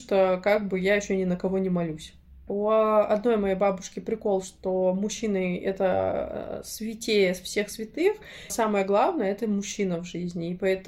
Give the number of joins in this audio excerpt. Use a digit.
2